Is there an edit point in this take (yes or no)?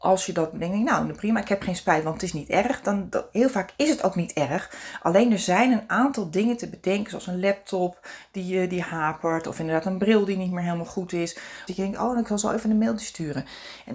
yes